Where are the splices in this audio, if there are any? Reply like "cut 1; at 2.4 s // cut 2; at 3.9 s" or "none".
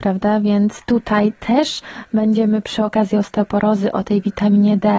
none